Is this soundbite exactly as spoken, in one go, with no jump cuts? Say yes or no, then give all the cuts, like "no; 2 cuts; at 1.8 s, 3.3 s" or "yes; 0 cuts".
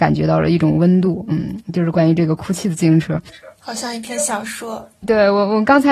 yes; 0 cuts